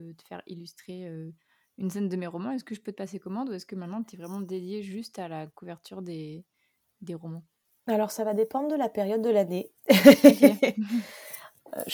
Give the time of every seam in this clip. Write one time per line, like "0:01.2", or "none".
none